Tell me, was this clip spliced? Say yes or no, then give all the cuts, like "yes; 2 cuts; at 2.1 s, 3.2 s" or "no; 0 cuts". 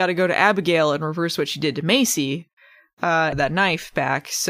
yes; 1 cut; at 3.3 s